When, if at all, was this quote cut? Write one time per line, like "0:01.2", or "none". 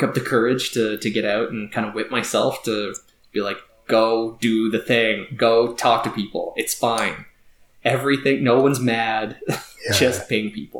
none